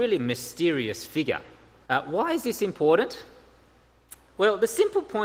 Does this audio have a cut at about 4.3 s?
no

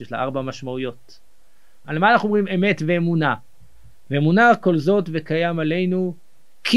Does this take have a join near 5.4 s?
no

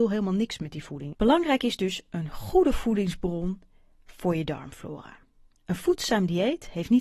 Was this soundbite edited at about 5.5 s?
no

